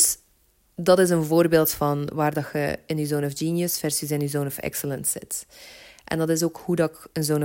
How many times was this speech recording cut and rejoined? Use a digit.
0